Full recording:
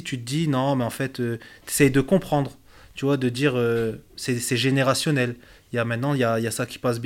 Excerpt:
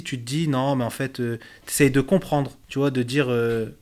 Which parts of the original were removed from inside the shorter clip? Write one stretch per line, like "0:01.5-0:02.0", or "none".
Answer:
0:02.6-0:02.9